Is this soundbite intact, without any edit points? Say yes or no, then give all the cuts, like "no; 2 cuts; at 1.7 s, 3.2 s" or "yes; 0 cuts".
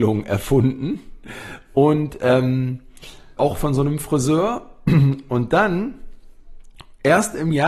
no; 1 cut; at 3.4 s